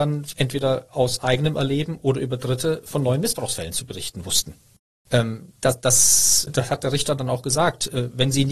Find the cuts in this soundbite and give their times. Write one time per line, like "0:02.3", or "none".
0:05.1
0:06.5